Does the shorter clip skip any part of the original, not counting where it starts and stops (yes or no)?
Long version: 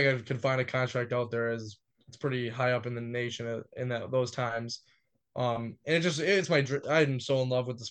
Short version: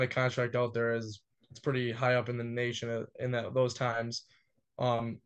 no